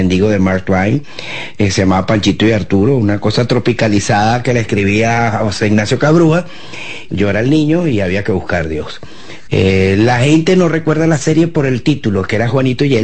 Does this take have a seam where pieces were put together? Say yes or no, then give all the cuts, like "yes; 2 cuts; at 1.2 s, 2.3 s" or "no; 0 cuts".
yes; 2 cuts; at 7.1 s, 9.5 s